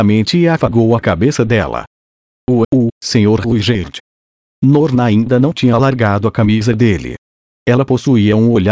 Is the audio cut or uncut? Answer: cut